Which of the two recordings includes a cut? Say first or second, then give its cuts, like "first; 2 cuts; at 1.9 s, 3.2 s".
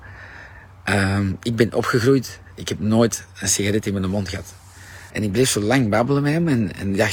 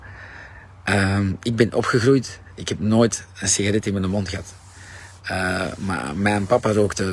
first; 1 cut; at 5.1 s